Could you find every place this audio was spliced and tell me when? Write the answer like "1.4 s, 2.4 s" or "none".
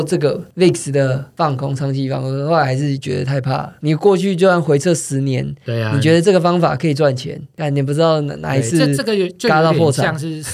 none